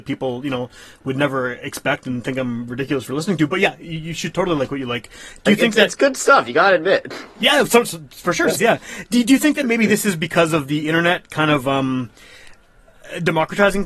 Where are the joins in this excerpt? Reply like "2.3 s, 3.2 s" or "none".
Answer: 8.6 s